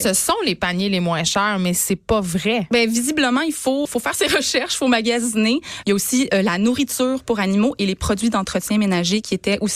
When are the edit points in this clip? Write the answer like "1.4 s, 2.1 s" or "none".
3.9 s, 5.8 s